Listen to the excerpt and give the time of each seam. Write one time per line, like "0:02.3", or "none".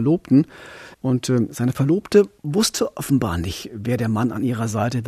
0:00.9
0:02.4